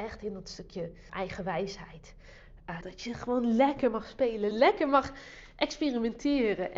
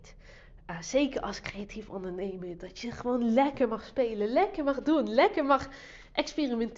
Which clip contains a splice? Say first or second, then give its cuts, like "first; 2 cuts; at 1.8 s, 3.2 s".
first; 3 cuts; at 1.1 s, 2.8 s, 4.5 s